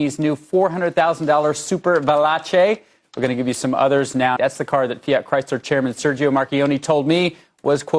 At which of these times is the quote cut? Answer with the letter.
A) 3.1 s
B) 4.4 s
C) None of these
B